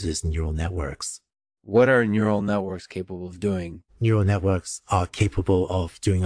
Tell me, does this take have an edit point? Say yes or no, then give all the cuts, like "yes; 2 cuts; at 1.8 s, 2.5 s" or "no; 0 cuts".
yes; 2 cuts; at 1.6 s, 3.9 s